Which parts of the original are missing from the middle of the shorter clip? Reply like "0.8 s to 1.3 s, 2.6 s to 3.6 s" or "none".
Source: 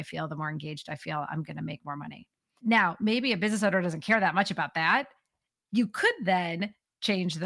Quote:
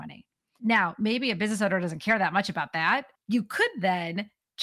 5.2 s to 5.6 s